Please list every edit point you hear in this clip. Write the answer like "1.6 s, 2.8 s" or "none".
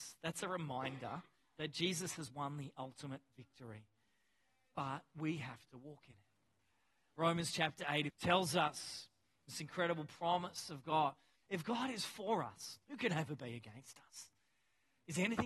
8.1 s, 11.4 s, 12.8 s